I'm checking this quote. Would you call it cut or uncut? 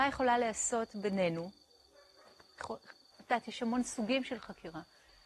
uncut